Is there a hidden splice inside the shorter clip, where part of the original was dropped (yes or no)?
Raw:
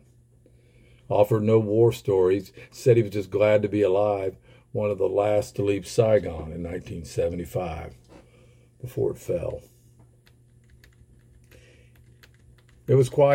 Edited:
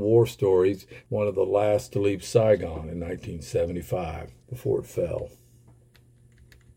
yes